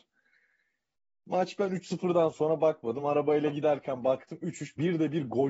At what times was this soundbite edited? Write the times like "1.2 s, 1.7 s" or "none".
none